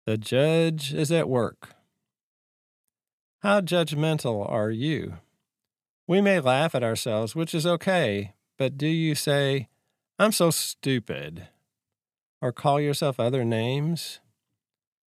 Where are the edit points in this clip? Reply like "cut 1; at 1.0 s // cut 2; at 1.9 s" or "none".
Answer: cut 1; at 5.9 s